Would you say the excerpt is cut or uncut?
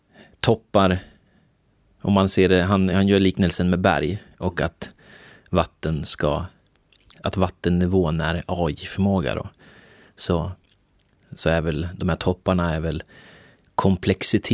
cut